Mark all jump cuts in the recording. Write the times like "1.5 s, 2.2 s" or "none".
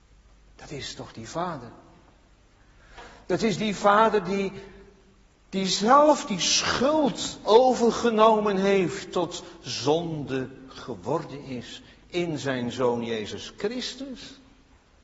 none